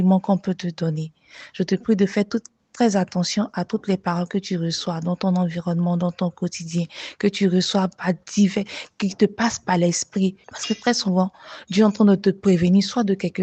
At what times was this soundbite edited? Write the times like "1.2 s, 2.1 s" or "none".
10.4 s